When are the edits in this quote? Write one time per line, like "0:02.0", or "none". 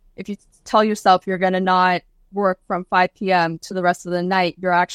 none